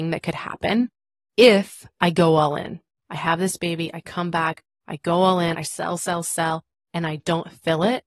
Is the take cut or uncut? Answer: cut